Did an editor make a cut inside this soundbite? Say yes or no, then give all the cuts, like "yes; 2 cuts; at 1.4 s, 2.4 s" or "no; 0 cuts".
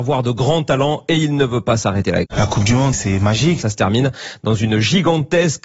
yes; 2 cuts; at 2.2 s, 3.6 s